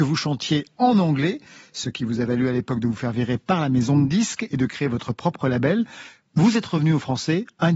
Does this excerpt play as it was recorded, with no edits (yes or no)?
yes